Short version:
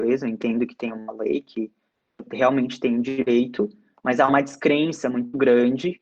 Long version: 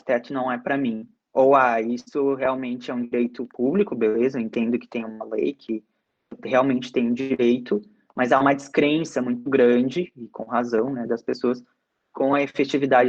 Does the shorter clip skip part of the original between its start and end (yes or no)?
no